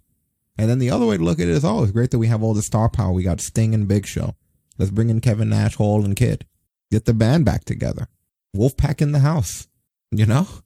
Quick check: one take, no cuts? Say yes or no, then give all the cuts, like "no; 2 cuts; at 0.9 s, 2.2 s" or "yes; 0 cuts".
yes; 0 cuts